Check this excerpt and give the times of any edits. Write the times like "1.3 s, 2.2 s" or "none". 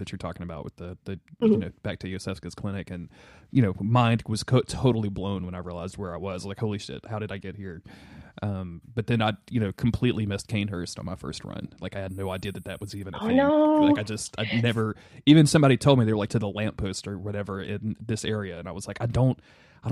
16.3 s

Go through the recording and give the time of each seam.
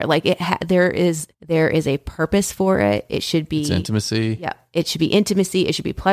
1.3 s

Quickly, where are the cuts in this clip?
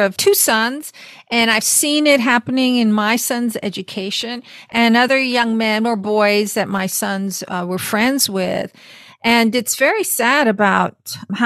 none

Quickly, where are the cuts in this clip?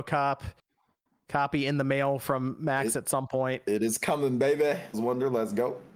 4.9 s

